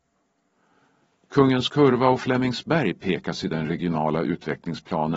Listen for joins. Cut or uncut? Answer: uncut